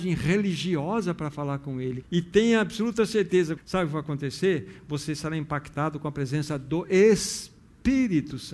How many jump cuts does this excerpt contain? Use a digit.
2